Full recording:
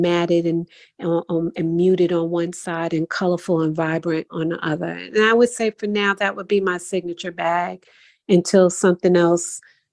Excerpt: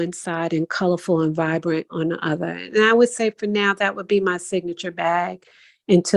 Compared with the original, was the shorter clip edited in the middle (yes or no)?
no